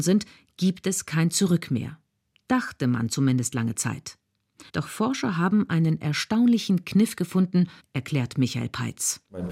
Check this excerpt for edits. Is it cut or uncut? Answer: cut